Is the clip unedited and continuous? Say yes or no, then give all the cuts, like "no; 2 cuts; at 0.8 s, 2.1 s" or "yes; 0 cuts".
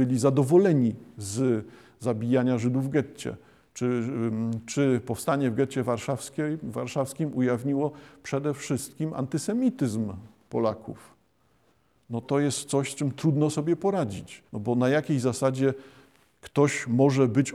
no; 2 cuts; at 12.2 s, 14.5 s